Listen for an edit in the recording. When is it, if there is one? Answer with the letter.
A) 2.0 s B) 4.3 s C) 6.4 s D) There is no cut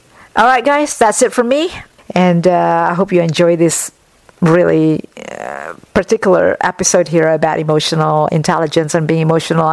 A